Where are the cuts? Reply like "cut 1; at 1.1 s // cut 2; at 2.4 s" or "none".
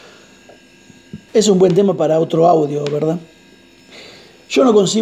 cut 1; at 1.3 s